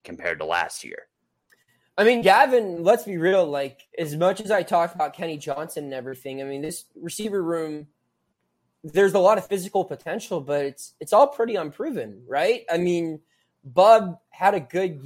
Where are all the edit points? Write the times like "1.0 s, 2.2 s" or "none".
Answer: none